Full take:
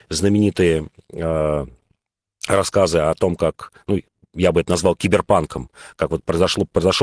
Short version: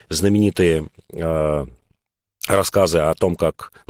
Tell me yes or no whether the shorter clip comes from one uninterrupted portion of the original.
yes